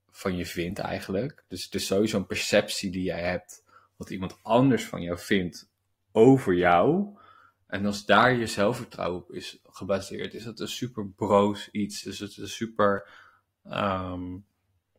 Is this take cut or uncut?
uncut